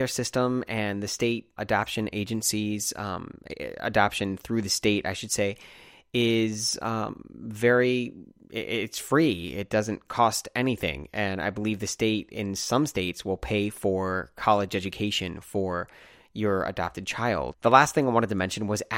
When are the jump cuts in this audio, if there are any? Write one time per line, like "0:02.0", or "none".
0:01.6
0:17.5